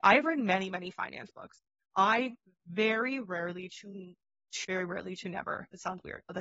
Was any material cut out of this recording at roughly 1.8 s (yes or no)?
no